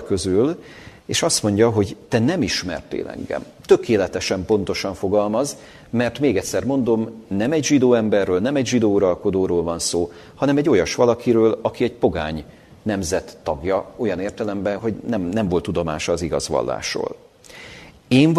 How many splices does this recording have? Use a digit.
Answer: 1